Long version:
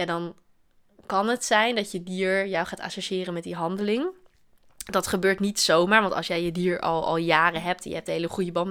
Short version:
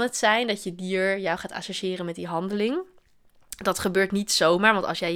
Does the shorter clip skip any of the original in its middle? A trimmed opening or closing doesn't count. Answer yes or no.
no